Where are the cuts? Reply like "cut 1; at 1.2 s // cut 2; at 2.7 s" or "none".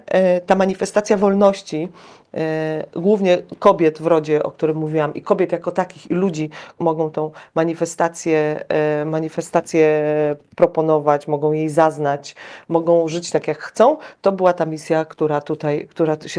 cut 1; at 6.8 s